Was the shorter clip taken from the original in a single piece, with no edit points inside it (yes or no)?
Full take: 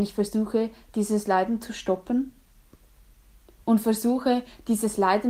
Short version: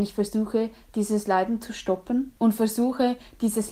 no